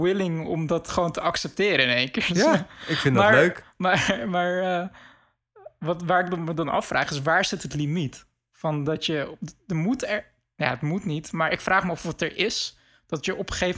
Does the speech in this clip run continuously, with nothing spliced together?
yes; 0 cuts

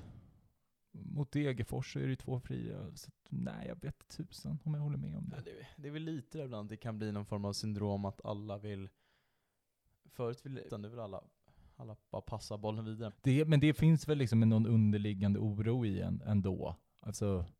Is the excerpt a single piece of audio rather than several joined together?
no; 2 cuts; at 10.7 s, 13.1 s

